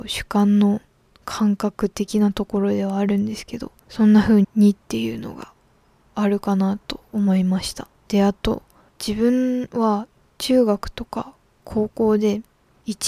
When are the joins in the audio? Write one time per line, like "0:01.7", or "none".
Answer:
0:04.4
0:08.0

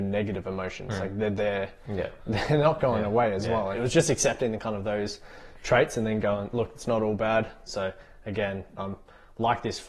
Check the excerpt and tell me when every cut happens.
0:03.7
0:07.7
0:08.8

